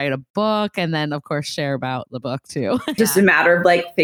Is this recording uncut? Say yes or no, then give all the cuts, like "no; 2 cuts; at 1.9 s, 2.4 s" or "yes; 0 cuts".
no; 1 cut; at 3.0 s